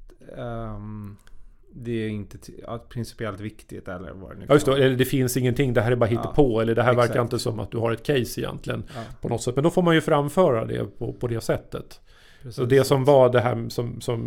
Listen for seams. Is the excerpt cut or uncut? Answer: uncut